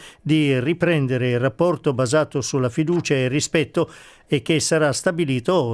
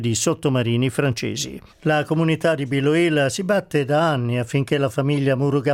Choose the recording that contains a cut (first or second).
second